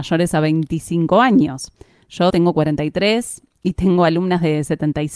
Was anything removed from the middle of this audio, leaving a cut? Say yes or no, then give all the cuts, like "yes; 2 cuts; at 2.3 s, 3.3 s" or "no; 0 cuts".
yes; 1 cut; at 2.3 s